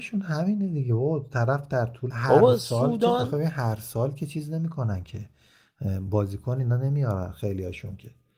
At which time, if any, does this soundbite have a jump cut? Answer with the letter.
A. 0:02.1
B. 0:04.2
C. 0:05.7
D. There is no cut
A